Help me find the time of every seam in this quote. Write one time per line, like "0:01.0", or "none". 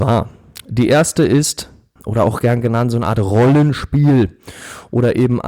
0:02.0